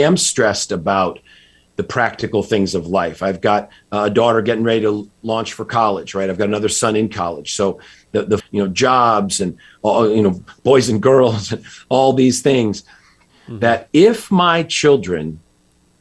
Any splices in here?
yes; 2 cuts; at 8.4 s, 13.3 s

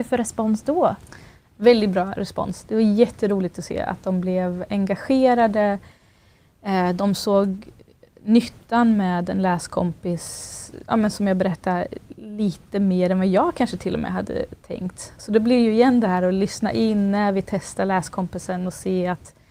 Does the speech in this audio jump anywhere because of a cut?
no; 0 cuts

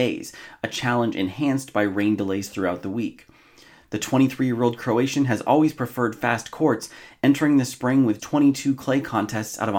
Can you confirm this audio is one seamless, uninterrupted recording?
no; 2 cuts; at 3.8 s, 8.2 s

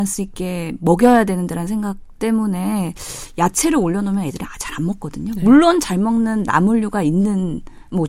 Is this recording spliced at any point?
no; 0 cuts

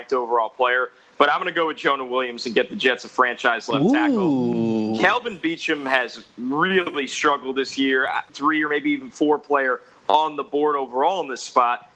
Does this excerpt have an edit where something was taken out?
yes; 1 cut; at 8.3 s

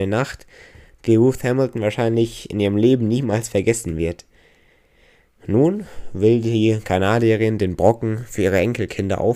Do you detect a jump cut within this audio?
no; 0 cuts

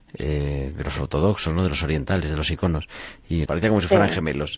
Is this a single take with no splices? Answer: no; 1 cut; at 3.5 s

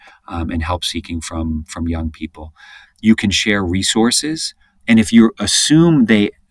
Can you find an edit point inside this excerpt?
yes; 1 cut; at 4.7 s

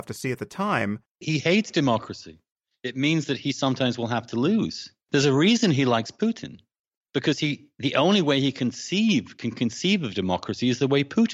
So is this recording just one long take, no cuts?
no; 1 cut; at 1.2 s

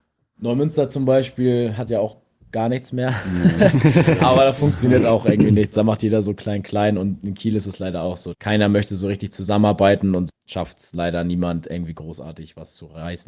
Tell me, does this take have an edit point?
yes; 2 cuts; at 8.3 s, 10.3 s

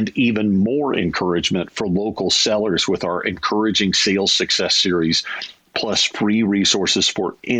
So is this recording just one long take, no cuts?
yes; 0 cuts

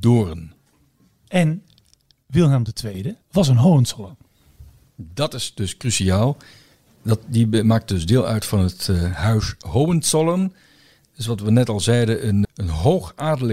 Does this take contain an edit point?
yes; 2 cuts; at 3.2 s, 12.4 s

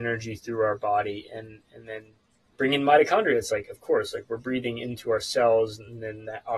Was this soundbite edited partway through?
no; 0 cuts

